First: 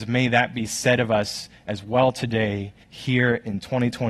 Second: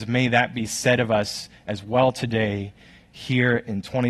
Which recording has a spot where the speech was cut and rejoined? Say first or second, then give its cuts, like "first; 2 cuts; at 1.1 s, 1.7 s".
first; 1 cut; at 2.8 s